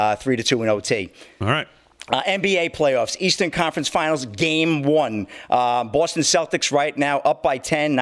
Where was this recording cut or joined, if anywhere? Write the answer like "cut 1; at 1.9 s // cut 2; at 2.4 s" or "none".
none